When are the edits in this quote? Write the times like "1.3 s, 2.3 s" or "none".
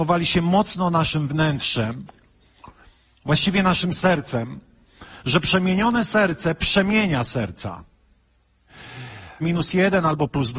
9.4 s